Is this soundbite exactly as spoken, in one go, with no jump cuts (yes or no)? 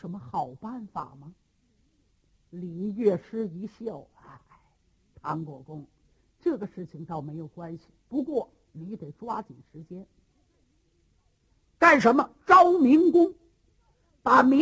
yes